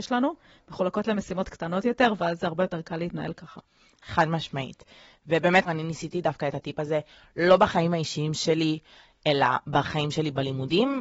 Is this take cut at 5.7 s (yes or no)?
yes